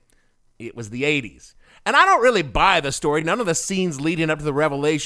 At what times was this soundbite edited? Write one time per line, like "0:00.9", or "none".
none